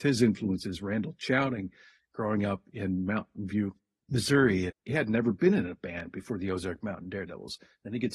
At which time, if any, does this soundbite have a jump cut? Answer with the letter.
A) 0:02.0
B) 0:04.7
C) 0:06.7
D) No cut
B